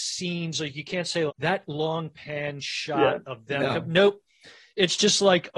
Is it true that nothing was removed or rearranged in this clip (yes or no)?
no